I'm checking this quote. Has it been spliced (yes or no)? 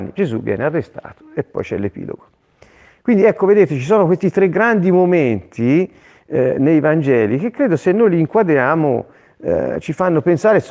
no